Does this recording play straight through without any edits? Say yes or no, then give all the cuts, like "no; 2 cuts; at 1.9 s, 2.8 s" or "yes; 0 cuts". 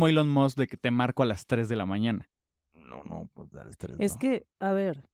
yes; 0 cuts